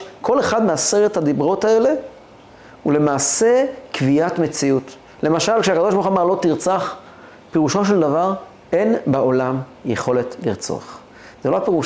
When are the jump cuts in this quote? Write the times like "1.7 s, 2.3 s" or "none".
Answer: none